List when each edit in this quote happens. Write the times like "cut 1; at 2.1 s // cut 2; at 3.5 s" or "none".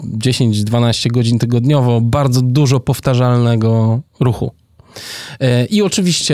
none